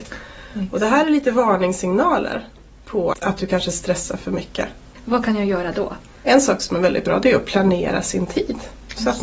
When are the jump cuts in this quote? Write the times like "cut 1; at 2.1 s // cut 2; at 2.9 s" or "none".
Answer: cut 1; at 3.1 s